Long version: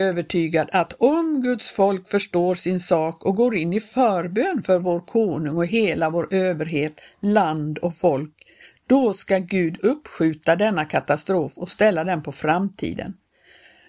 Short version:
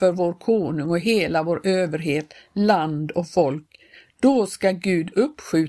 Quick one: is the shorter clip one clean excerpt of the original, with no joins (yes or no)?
yes